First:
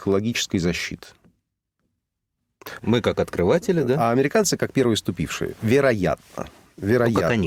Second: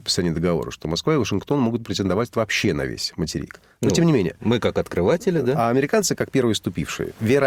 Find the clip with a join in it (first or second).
first